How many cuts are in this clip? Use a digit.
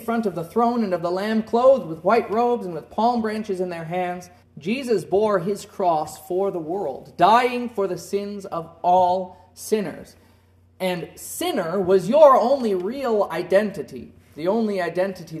1